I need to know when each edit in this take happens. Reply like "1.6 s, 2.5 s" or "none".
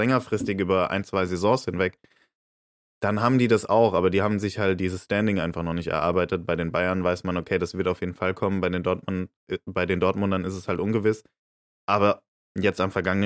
none